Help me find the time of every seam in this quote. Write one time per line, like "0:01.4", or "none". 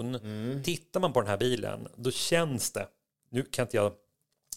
none